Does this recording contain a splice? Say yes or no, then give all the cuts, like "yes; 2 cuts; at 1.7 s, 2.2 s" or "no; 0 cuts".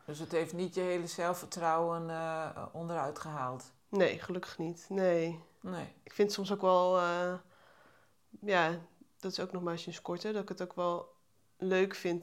no; 0 cuts